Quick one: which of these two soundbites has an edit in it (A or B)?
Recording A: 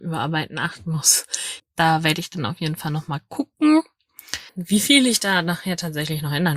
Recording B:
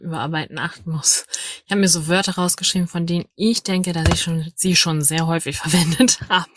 A